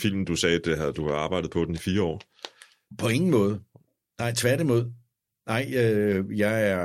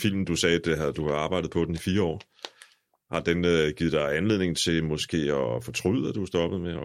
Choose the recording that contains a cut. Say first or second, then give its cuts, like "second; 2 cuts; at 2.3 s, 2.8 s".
first; 1 cut; at 2.9 s